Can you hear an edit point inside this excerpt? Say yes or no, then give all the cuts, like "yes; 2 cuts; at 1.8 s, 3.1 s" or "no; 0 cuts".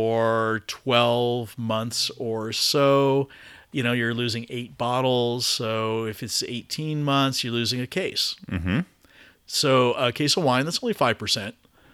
no; 0 cuts